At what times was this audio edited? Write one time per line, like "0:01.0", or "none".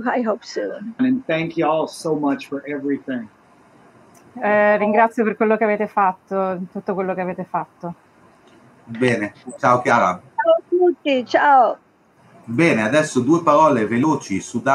0:01.0